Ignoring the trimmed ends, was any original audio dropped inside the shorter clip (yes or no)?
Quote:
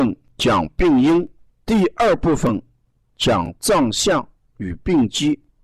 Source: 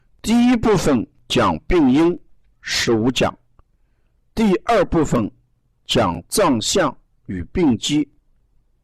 yes